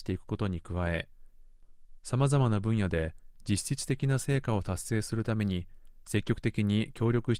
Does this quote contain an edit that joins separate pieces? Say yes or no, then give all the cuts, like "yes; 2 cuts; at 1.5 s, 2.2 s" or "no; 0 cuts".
no; 0 cuts